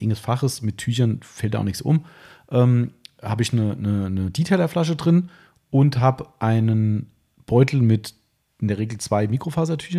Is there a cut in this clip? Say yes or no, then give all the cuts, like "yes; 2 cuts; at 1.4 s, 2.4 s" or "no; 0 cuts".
no; 0 cuts